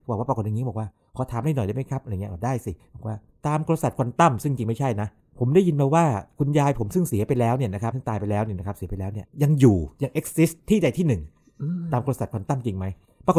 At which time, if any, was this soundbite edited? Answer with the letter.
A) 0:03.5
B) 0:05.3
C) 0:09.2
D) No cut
C